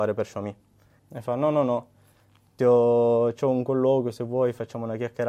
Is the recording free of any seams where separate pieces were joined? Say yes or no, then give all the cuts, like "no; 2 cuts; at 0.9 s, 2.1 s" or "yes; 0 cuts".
no; 1 cut; at 1.0 s